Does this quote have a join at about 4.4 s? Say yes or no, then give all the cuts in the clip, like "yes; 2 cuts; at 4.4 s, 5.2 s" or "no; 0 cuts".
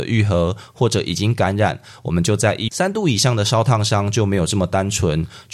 no; 1 cut; at 2.7 s